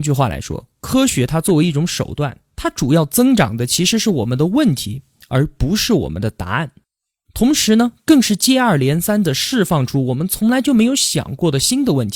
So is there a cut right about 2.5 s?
no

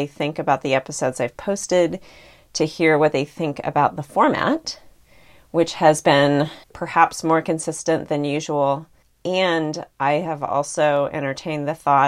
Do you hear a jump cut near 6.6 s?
yes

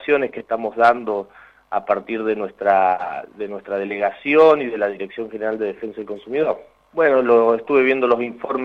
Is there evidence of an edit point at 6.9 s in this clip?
yes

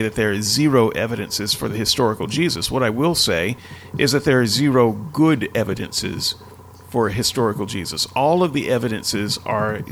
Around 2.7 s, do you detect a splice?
no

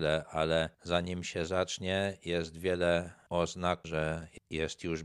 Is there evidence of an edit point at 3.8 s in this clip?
yes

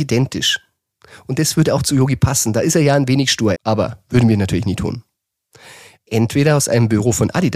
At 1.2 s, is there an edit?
no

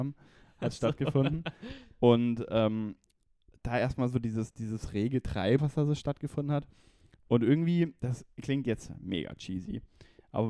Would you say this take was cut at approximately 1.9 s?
no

